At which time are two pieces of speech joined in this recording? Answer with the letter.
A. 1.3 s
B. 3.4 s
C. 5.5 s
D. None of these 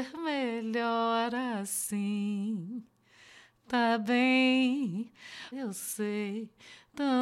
C